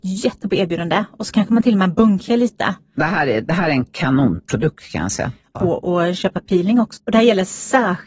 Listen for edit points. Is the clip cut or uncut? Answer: cut